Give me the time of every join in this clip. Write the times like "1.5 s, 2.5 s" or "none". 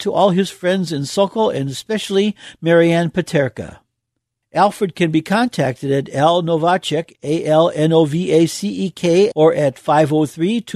4.4 s, 9.3 s